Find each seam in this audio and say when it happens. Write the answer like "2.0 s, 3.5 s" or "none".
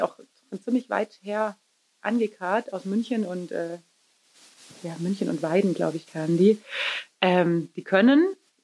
none